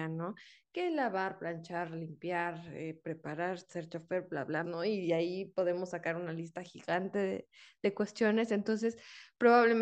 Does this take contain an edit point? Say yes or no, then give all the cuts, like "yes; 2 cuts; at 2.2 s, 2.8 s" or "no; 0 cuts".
yes; 1 cut; at 4.6 s